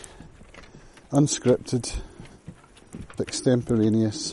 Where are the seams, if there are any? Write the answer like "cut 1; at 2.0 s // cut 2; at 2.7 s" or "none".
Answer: cut 1; at 3.2 s